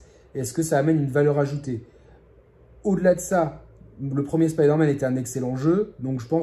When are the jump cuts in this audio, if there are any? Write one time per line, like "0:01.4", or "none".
none